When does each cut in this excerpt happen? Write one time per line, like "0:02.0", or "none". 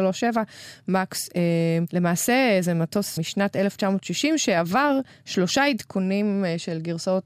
0:01.9
0:03.2